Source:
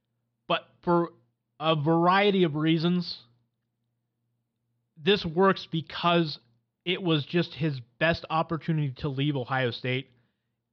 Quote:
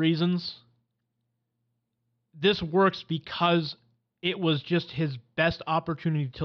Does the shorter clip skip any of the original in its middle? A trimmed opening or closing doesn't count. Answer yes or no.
no